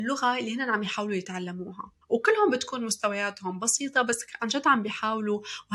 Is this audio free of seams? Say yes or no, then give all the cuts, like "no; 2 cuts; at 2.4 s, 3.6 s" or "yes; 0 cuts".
no; 1 cut; at 2.0 s